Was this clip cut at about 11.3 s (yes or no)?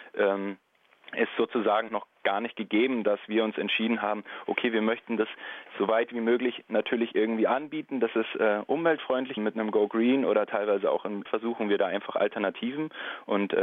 yes